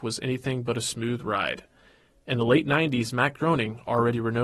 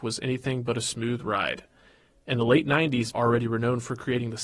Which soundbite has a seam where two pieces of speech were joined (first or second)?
second